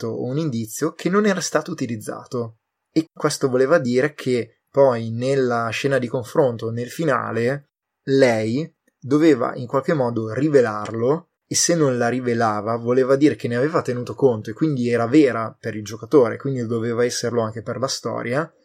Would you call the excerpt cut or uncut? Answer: cut